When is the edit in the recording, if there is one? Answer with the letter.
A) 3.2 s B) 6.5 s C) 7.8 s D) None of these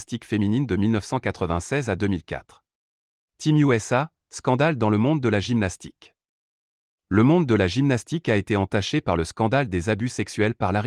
A